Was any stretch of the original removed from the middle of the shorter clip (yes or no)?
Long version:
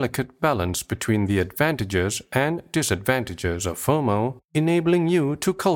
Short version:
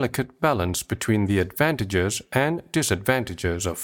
no